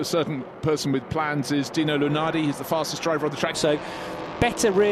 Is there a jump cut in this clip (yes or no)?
yes